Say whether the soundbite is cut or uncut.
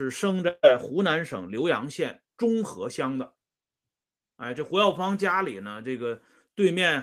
uncut